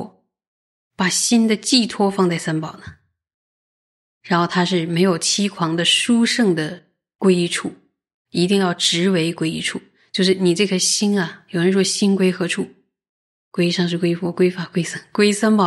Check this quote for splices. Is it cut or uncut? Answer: uncut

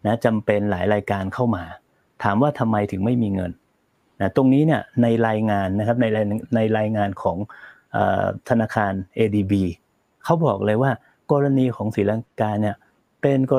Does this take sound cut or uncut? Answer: uncut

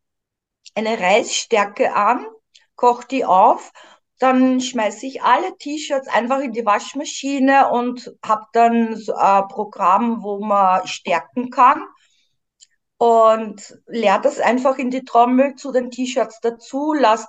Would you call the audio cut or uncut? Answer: uncut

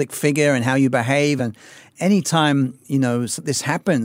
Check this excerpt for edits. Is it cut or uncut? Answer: cut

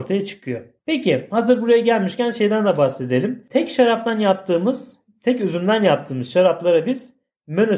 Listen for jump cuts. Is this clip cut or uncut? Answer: uncut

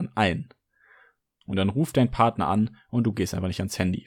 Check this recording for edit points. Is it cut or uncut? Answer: cut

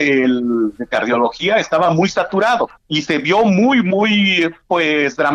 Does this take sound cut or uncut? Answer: cut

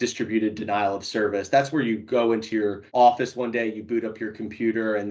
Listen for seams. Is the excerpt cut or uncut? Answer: cut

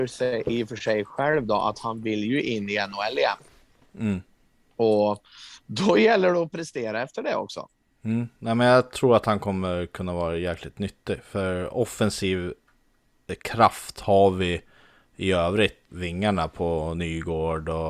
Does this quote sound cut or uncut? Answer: cut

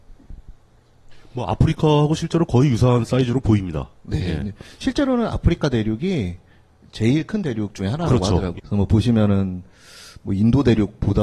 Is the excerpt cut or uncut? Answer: cut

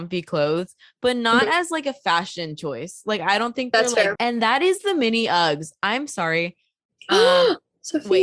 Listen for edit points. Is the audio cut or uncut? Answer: cut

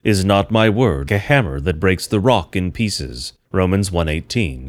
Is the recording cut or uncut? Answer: cut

